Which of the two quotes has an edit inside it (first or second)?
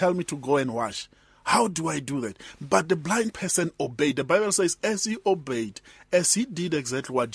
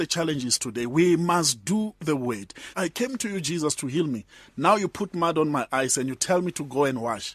second